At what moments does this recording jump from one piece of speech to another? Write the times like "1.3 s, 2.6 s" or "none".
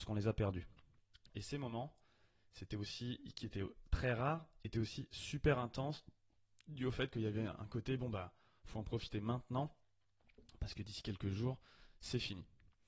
1.3 s

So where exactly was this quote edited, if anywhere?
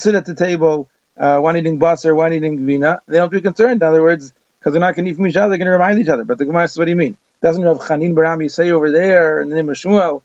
none

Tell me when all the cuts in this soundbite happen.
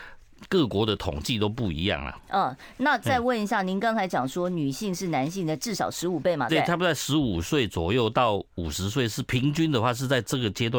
2.2 s, 6.5 s

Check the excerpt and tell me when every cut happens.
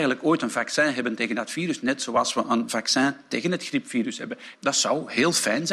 4.5 s

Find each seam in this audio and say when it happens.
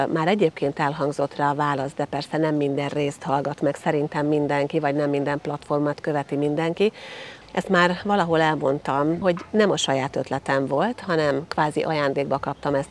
7.4 s, 9.2 s

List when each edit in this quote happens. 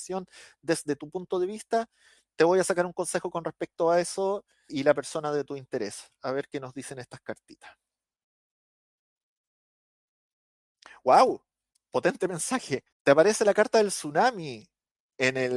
4.7 s, 12.9 s

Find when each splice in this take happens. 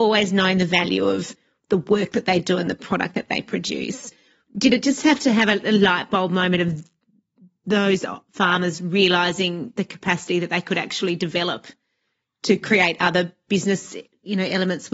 none

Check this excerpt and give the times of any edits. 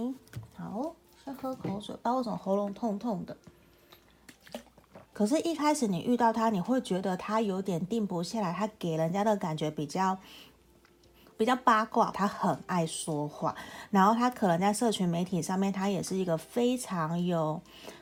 5.1 s, 12.1 s

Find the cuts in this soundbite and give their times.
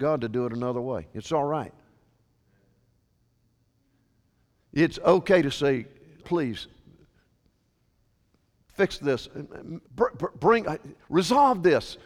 6.2 s, 9.8 s

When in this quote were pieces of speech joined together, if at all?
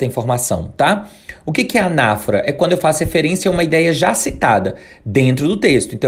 none

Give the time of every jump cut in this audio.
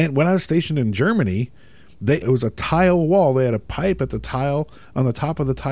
2.2 s

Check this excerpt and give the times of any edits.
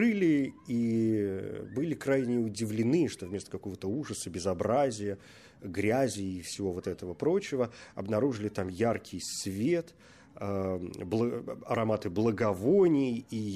none

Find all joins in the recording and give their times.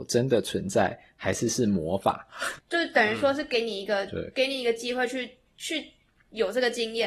2.6 s

